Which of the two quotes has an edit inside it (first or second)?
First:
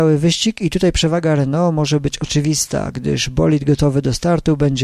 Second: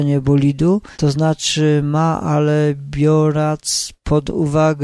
second